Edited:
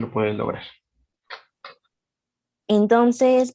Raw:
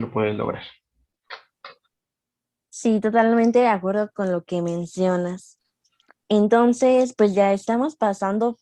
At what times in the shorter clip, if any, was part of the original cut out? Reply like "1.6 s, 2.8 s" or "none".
2.6 s